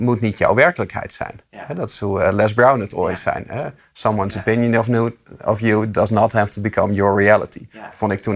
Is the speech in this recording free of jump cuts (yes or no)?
yes